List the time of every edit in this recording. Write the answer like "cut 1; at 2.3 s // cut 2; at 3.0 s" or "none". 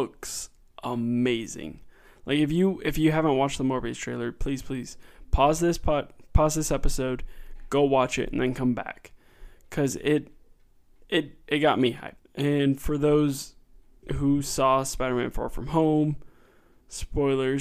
cut 1; at 12.2 s